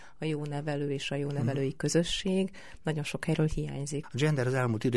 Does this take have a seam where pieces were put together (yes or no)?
yes